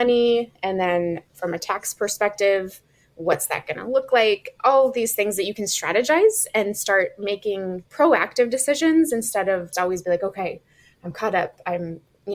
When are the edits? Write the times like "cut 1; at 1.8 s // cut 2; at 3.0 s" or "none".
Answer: cut 1; at 7.9 s // cut 2; at 9.7 s